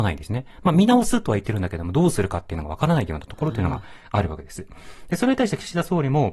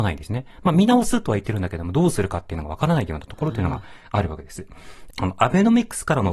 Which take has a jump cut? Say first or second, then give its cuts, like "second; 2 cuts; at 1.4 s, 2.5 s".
second; 1 cut; at 5.1 s